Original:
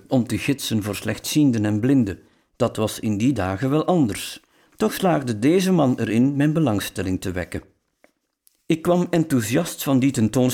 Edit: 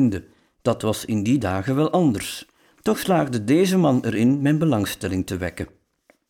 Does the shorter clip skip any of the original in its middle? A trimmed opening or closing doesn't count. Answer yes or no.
no